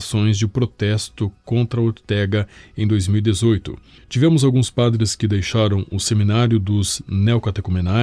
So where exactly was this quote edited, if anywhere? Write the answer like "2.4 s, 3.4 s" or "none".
none